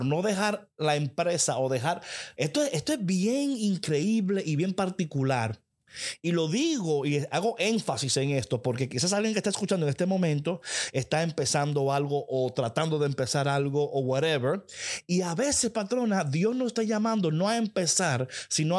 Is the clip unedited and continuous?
no; 1 cut; at 2.3 s

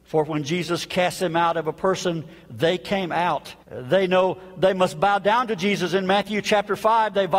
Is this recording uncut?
no; 1 cut; at 3.6 s

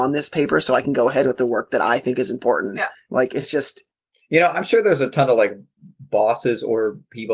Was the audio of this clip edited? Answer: no; 0 cuts

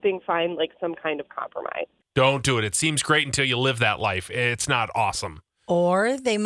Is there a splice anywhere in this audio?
yes; 1 cut; at 2.0 s

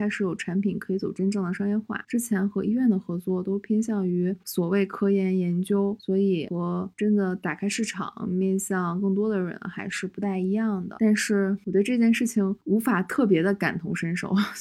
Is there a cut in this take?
no; 0 cuts

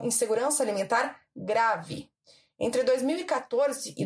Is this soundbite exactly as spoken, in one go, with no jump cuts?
yes; 0 cuts

